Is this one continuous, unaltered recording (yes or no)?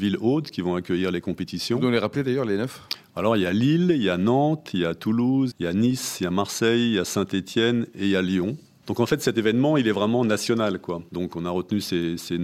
no